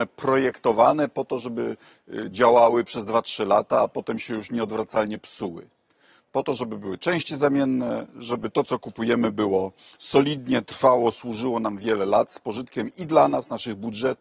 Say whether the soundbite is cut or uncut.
uncut